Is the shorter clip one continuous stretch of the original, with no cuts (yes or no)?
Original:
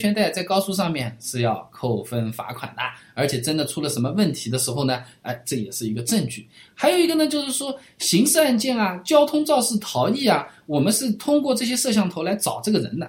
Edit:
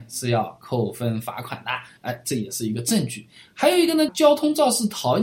no